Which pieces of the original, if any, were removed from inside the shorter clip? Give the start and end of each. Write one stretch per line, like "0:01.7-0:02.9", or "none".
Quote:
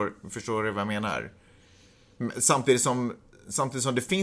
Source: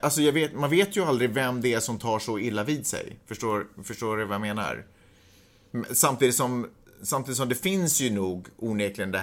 none